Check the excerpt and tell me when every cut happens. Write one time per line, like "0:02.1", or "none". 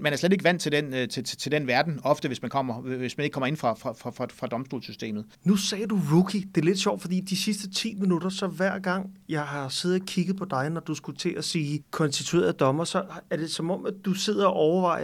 0:05.3